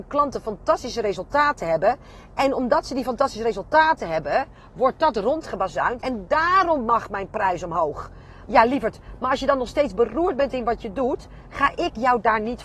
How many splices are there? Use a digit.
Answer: 2